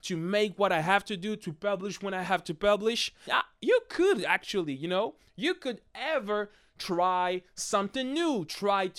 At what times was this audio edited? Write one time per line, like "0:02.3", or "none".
0:03.3